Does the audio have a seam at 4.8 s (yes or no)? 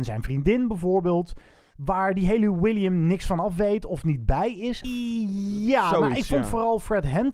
yes